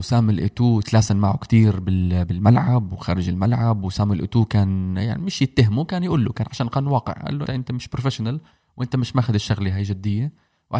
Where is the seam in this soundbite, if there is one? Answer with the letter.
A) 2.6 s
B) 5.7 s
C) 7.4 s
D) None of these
C